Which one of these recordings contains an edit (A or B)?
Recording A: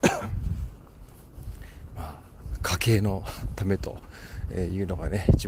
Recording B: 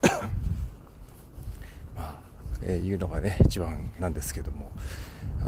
B